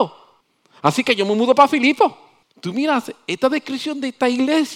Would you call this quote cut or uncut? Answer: cut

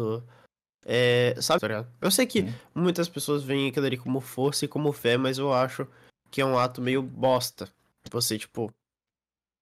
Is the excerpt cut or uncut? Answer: cut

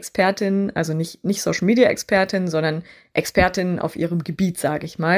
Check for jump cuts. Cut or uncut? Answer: uncut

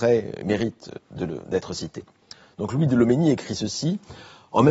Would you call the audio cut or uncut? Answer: uncut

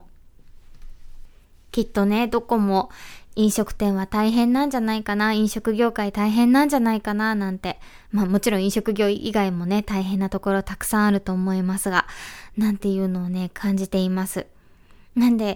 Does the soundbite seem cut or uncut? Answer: uncut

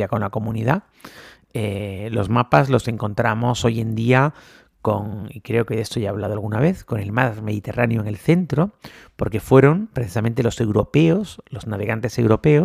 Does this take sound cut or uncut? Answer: uncut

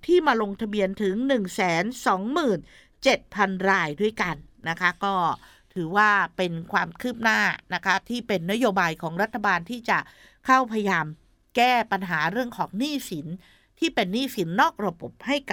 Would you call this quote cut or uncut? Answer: uncut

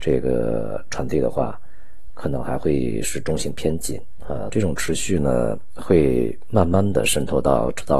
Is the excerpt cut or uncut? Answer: cut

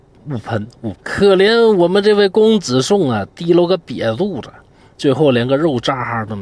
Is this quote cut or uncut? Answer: cut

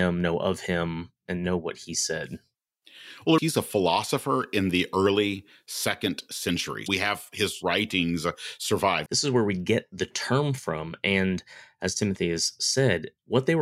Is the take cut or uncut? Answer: cut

